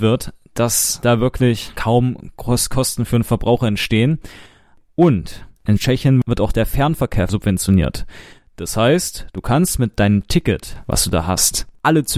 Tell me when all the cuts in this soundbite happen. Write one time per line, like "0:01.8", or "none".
0:05.6